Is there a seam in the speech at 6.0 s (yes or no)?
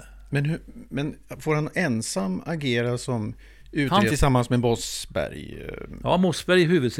no